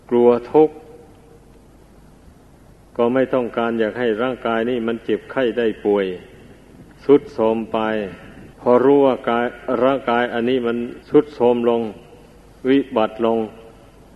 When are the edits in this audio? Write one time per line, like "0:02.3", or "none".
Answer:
0:08.5
0:11.0